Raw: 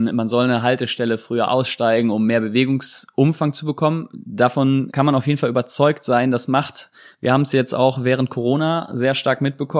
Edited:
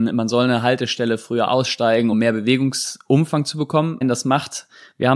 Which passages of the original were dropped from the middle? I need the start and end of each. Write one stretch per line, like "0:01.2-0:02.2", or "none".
0:02.1-0:02.2
0:04.1-0:06.2

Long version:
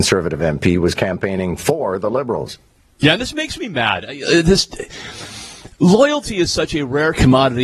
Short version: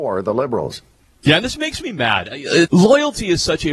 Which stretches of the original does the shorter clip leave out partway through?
0:04.4-0:05.7

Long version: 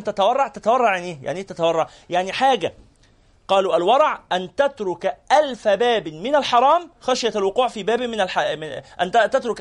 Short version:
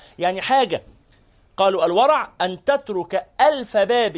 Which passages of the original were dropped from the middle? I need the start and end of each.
none

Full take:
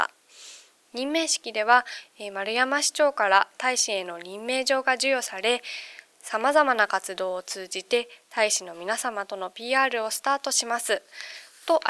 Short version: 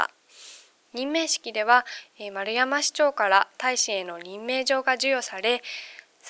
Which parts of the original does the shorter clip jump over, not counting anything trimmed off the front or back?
none

